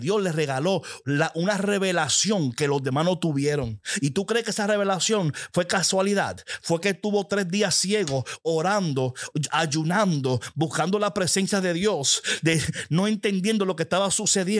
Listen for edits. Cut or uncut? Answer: uncut